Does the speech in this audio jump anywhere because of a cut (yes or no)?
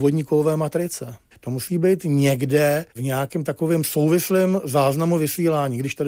yes